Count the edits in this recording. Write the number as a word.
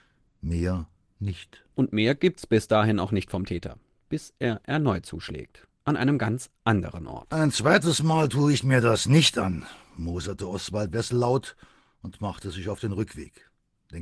zero